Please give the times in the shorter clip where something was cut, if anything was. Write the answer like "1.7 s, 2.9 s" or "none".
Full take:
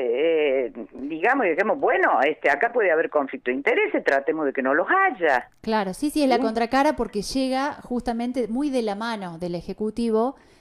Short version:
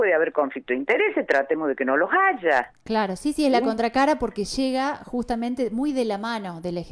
none